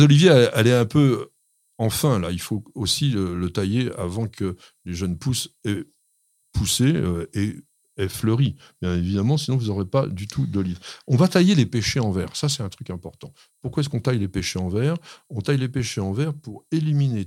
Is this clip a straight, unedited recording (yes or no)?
yes